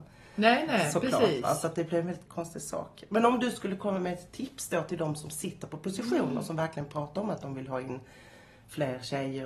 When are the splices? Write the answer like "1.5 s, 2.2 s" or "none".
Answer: 2.3 s